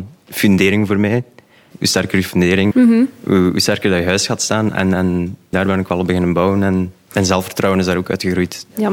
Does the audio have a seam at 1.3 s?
no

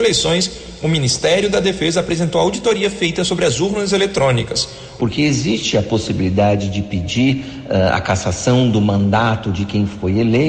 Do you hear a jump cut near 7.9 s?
no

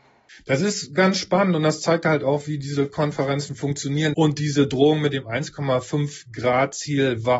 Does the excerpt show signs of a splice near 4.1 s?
yes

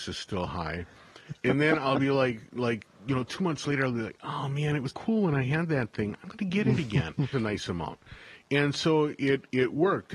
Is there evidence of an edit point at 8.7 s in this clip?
no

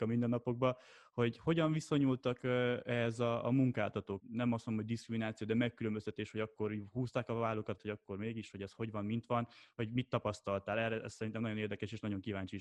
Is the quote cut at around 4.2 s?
yes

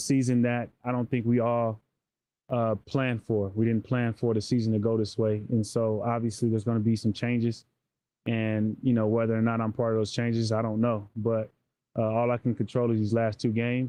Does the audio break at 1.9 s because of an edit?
no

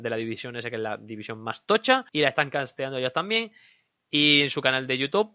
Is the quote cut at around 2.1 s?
yes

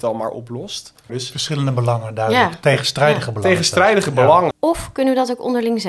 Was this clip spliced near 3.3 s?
no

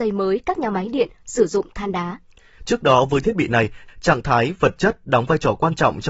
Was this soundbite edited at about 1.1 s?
no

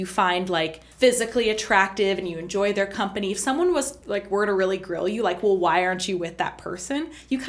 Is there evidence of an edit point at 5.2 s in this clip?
no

